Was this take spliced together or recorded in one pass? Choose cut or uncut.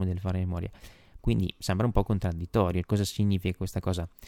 cut